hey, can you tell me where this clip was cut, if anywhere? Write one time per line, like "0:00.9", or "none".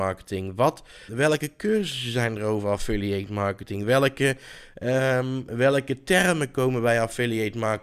0:01.1